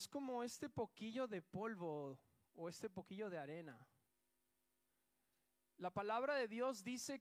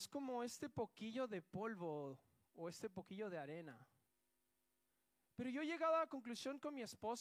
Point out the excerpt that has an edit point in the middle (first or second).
second